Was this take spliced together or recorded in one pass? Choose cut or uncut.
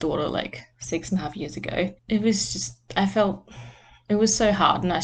cut